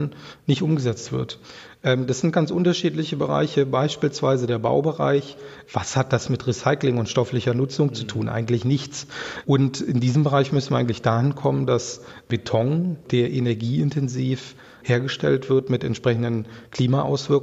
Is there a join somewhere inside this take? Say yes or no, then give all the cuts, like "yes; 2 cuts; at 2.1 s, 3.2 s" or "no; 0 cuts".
yes; 1 cut; at 5.7 s